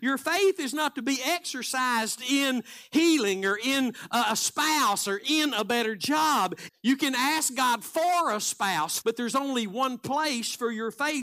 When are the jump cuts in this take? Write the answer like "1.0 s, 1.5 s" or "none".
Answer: 6.7 s, 9.0 s